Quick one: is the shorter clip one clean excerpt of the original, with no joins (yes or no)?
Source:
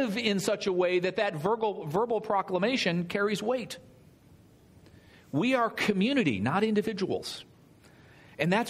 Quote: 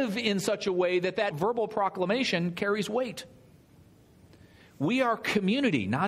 no